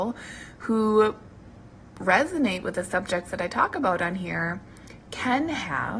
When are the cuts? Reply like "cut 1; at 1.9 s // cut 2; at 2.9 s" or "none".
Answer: none